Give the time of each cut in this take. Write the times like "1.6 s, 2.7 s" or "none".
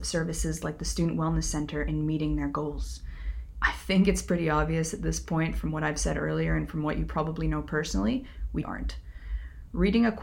3.5 s, 8.6 s